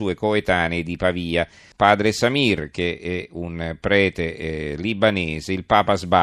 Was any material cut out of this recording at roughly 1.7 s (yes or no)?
yes